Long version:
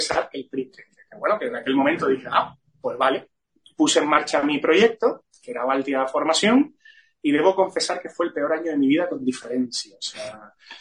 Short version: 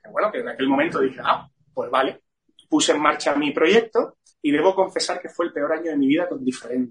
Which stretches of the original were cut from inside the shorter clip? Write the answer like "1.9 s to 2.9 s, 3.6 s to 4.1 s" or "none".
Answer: 5.4 s to 7.1 s

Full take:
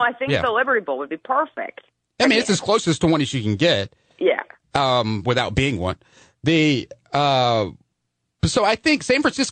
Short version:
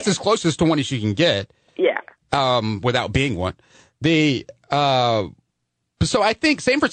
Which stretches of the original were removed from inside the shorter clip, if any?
none

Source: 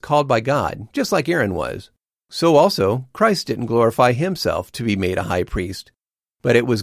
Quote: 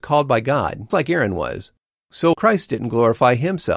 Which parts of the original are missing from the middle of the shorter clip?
0.9 s to 1.1 s, 2.5 s to 3.1 s

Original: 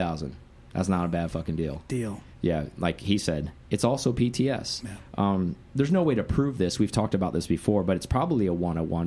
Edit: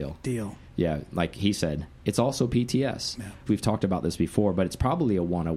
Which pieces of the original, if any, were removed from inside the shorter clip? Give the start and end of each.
5.1 s to 6.8 s

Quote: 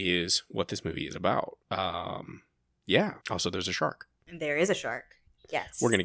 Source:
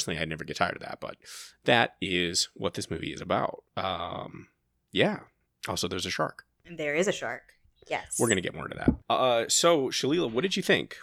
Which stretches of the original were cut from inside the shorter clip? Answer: 5.3 s to 5.6 s

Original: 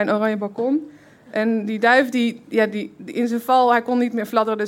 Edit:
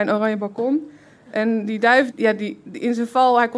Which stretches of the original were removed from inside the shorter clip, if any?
2.1 s to 2.4 s

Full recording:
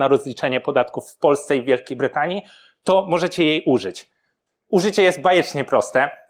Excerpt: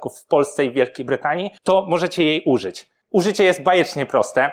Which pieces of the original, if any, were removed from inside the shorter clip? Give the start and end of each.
2.5 s to 2.8 s, 4.2 s to 4.6 s

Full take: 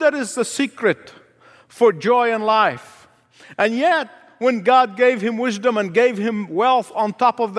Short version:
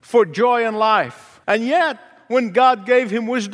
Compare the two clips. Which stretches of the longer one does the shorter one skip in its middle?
3.1 s to 3.5 s

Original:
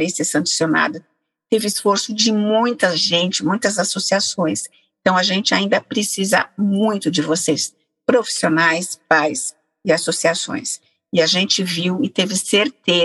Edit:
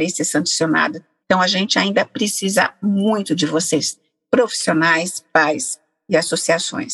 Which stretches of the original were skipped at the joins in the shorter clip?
1.2 s to 5.0 s

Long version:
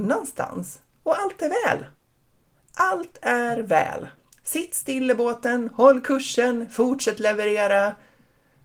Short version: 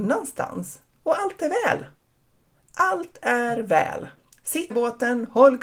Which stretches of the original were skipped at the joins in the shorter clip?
4.7 s to 5.1 s

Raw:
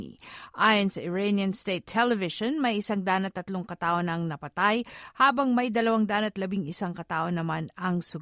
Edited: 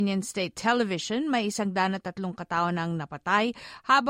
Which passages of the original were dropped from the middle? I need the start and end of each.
none

